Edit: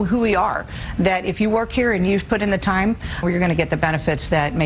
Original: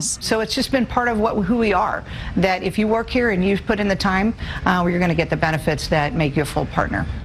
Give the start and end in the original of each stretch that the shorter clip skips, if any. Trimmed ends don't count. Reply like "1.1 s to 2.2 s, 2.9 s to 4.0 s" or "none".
4.6 s to 4.8 s